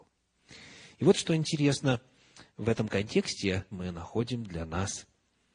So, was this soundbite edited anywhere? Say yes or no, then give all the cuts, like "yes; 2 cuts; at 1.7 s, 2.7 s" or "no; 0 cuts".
yes; 1 cut; at 3.7 s